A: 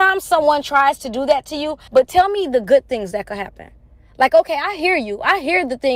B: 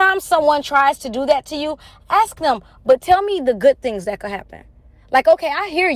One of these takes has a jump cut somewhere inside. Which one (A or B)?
A